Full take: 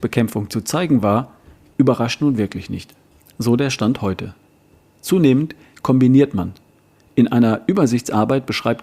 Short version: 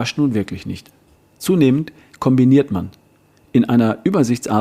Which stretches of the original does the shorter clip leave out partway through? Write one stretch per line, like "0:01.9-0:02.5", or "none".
0:03.2-0:04.8